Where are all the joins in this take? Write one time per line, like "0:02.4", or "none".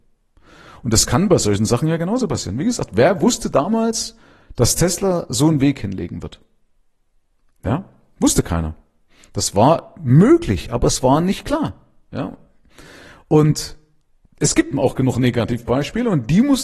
0:14.7